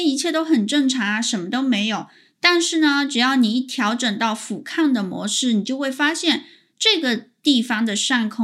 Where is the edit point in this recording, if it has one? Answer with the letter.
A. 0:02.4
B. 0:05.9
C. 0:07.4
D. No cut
D